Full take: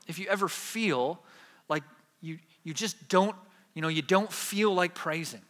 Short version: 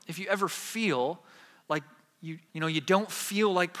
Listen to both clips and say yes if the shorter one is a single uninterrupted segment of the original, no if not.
no